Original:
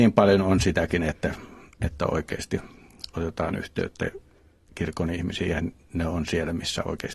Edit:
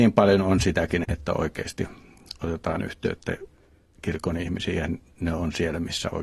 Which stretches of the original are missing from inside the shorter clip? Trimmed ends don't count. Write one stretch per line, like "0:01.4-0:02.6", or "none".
0:01.0-0:01.8